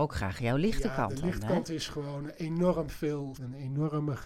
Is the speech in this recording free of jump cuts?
no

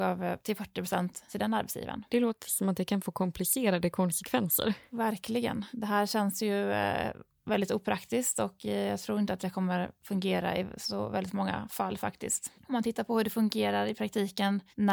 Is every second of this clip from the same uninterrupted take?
yes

